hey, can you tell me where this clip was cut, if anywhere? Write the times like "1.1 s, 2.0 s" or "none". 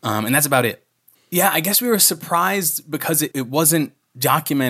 1.1 s, 3.3 s

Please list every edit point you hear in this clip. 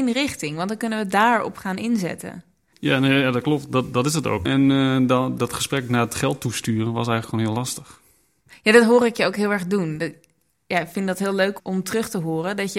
4.5 s, 11.6 s

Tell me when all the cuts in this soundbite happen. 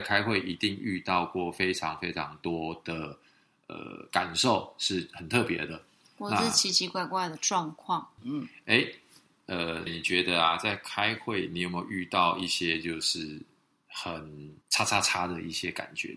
8.2 s, 9.9 s, 14.6 s

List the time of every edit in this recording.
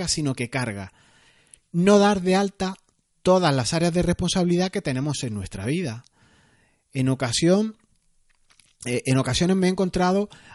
none

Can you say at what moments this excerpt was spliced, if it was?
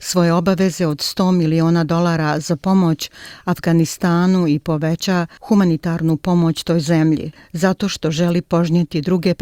7.4 s

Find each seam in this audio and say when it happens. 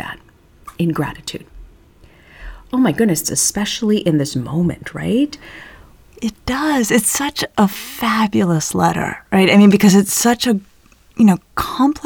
3.2 s

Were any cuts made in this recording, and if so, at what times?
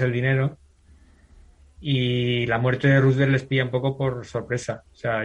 none

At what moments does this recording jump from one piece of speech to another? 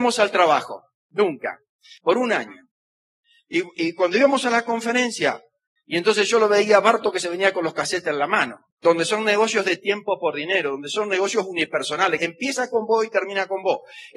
2.0 s, 8.7 s, 12.2 s

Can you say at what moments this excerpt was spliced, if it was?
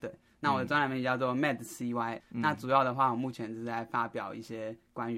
2.2 s

